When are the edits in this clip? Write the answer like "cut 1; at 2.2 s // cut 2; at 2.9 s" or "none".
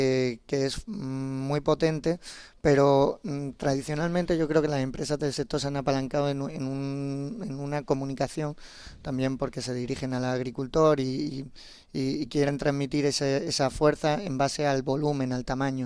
none